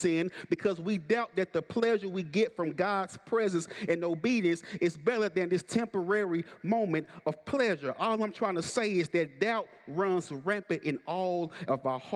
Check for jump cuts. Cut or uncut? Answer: uncut